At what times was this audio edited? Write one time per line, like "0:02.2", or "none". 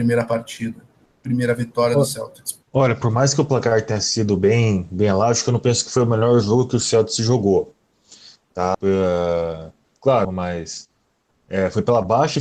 0:02.6
0:08.7
0:10.2